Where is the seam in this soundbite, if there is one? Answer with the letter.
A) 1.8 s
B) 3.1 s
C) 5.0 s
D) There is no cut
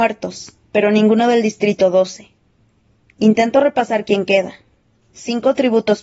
D